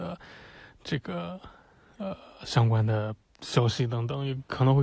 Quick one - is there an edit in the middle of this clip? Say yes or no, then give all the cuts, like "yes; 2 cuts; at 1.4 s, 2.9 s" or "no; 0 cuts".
no; 0 cuts